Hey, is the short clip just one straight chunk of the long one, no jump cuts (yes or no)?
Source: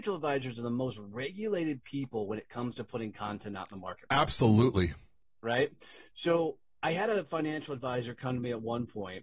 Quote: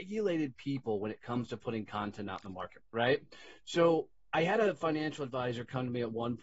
no